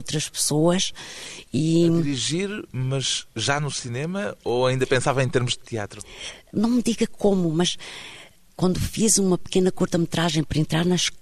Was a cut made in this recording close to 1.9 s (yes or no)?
no